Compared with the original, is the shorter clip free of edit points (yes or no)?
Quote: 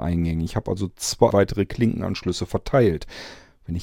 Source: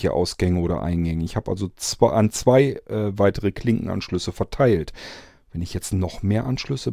no